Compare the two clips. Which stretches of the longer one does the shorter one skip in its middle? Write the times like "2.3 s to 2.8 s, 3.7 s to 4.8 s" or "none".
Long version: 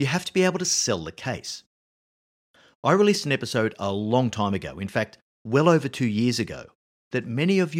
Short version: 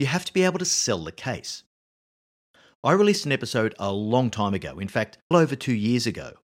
5.3 s to 5.6 s